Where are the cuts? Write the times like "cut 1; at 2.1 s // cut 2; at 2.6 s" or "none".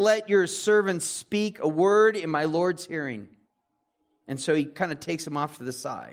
none